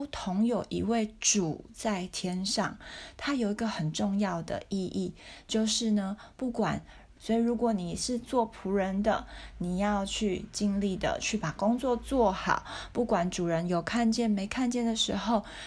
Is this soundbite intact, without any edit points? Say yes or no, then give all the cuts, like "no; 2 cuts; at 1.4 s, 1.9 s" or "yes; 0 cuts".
no; 1 cut; at 7.2 s